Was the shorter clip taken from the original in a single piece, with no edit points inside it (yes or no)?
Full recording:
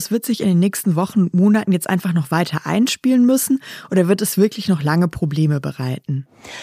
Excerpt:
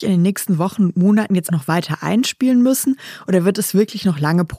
no